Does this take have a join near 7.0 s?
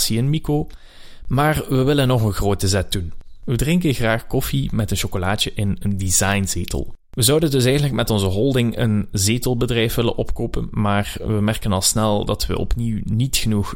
yes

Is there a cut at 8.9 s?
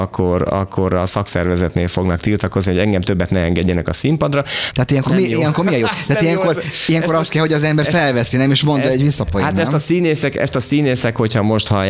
no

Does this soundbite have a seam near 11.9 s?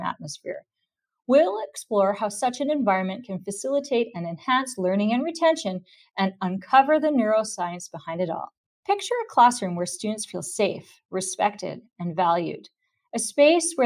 no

